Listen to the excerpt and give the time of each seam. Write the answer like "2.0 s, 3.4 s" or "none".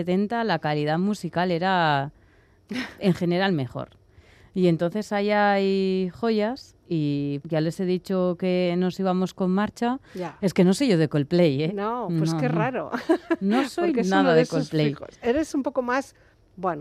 7.4 s, 10.4 s